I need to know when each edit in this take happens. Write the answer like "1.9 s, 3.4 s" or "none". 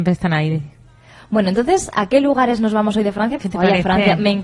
3.4 s